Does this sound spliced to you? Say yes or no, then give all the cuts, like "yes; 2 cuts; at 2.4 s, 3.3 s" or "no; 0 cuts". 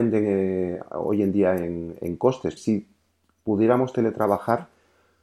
yes; 1 cut; at 2.6 s